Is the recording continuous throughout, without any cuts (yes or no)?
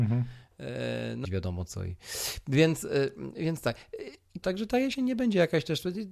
no